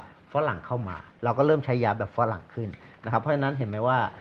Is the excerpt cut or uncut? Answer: uncut